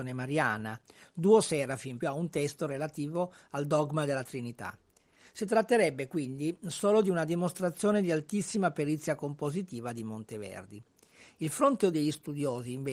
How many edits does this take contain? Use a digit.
1